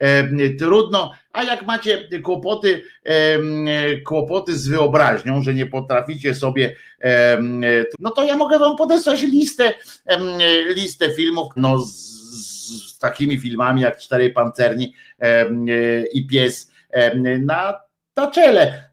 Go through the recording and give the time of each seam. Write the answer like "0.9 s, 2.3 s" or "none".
7.9 s, 11.6 s